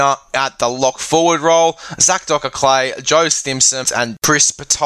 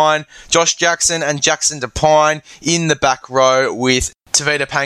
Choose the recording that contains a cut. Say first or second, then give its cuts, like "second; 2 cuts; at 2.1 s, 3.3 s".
first; 1 cut; at 3.8 s